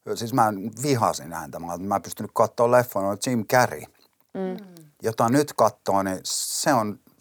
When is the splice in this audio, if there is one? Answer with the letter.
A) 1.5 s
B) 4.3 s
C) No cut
C